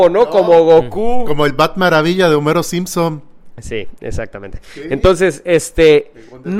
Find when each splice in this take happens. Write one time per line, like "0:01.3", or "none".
none